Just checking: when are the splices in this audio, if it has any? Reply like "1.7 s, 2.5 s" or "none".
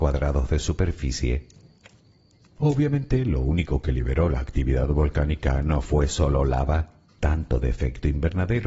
7.1 s